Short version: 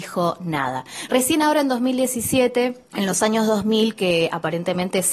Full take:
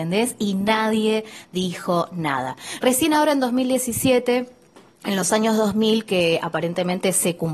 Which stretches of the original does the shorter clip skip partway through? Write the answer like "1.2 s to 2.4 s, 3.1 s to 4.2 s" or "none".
4.6 s to 5.0 s